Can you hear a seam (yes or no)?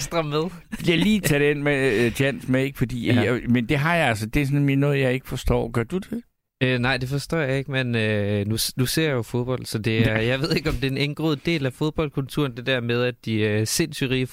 no